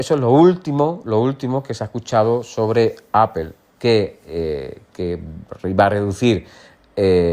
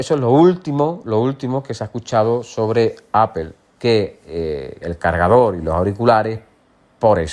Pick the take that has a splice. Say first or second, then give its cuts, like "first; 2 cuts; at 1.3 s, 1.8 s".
second; 1 cut; at 4.8 s